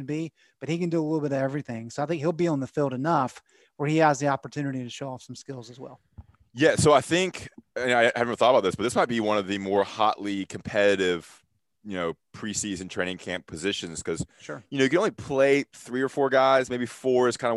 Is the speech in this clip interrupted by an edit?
no; 0 cuts

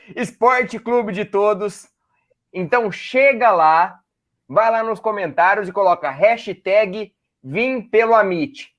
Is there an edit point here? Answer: yes; 1 cut; at 2.5 s

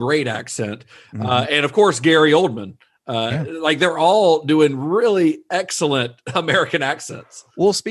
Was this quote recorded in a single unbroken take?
yes; 0 cuts

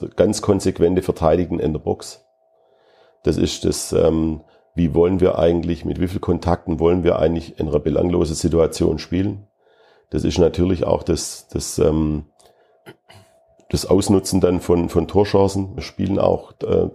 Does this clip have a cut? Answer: yes; 1 cut; at 15.8 s

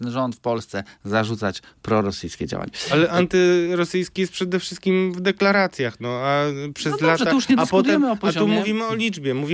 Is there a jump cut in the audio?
no; 0 cuts

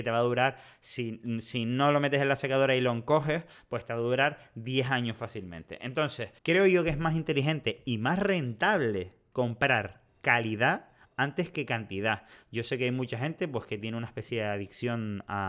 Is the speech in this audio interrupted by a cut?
yes; 1 cut; at 6.4 s

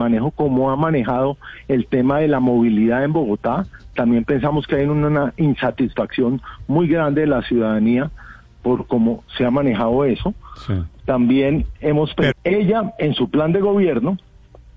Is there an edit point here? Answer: yes; 2 cuts; at 11.0 s, 12.3 s

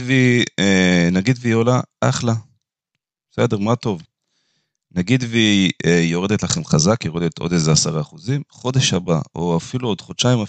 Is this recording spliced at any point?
no; 0 cuts

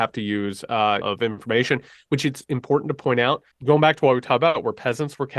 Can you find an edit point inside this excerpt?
yes; 2 cuts; at 1.0 s, 3.5 s

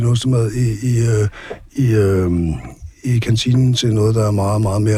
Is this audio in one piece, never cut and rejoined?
yes; 0 cuts

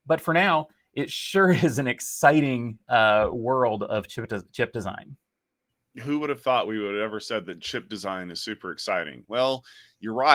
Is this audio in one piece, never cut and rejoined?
no; 1 cut; at 9.2 s

